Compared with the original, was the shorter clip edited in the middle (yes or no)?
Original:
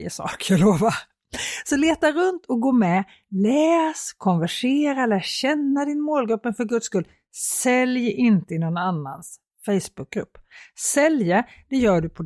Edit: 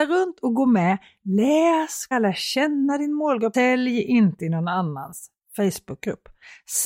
yes